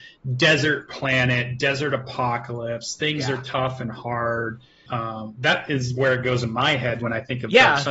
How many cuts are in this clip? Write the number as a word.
one